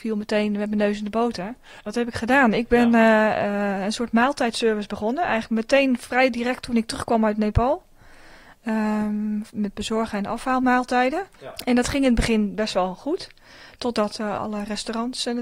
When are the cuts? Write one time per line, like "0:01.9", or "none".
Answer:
0:01.8
0:14.4

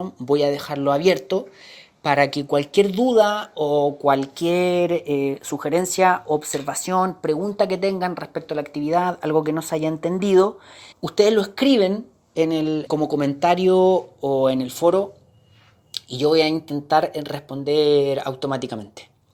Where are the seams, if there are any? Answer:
0:10.9
0:12.9

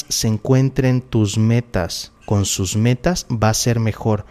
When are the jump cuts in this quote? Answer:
0:02.2

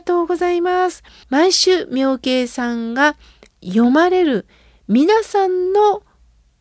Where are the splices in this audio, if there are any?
0:01.2

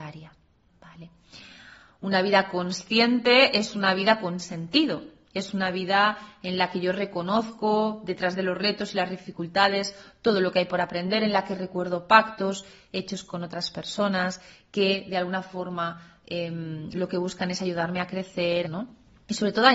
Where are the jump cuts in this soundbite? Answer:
0:18.6

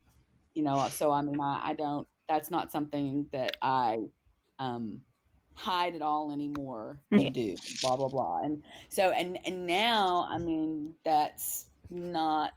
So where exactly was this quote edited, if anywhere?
0:07.2

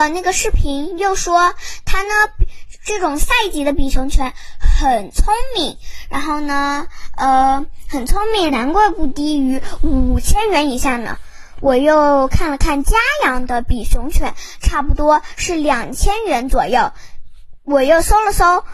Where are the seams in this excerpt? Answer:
0:08.5

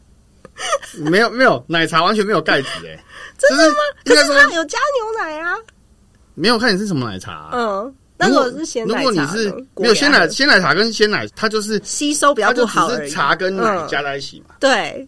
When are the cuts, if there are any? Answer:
0:09.7
0:11.3

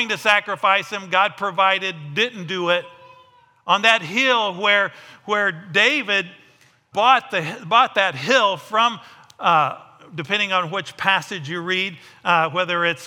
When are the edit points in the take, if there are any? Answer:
0:06.9

